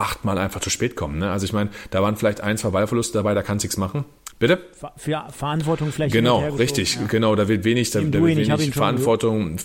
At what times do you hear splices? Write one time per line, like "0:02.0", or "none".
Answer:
0:04.3